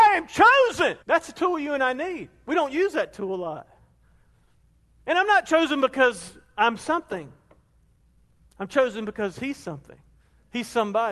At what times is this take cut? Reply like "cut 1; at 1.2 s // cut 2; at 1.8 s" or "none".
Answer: cut 1; at 1.0 s